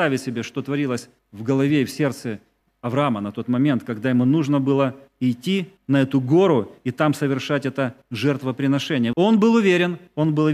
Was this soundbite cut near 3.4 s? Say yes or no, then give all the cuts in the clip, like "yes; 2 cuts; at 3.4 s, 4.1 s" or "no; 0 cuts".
no; 1 cut; at 9.1 s